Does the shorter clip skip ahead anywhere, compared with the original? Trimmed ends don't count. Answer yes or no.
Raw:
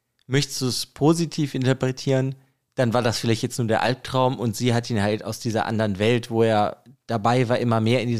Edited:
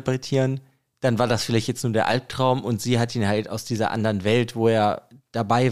no